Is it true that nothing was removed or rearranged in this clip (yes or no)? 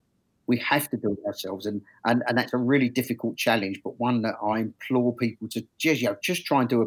yes